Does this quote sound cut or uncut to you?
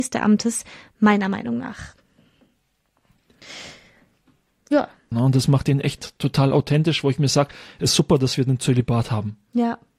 cut